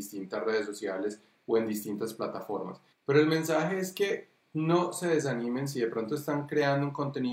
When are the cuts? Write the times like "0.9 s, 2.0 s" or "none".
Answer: 2.9 s